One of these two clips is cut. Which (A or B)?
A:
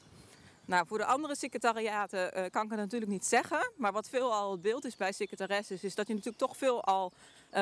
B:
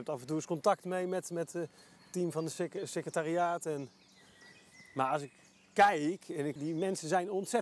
B